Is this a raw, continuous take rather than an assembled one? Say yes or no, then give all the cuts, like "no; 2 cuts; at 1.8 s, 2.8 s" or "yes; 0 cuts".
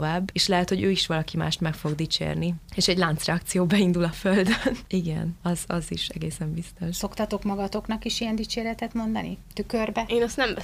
no; 1 cut; at 4.9 s